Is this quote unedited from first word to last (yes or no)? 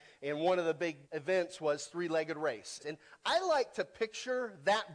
no